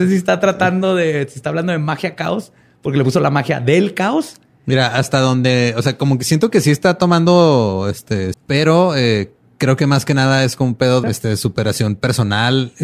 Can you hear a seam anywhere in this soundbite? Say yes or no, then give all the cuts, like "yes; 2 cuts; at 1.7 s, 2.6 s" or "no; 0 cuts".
yes; 2 cuts; at 8.3 s, 11.0 s